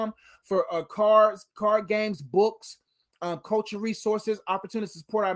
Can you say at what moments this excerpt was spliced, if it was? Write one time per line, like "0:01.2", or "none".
none